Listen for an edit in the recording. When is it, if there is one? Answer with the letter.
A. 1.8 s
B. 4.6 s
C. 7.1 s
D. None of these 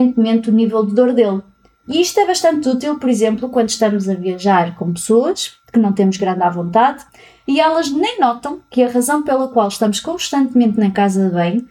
A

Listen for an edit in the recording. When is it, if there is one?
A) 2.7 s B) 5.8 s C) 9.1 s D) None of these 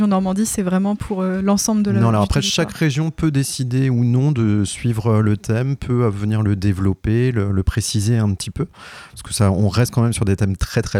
D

